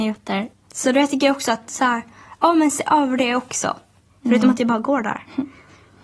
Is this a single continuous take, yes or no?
no